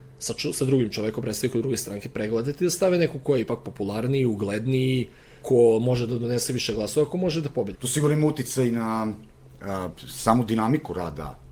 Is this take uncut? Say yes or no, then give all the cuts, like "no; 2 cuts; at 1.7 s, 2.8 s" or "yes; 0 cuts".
no; 2 cuts; at 5.4 s, 7.7 s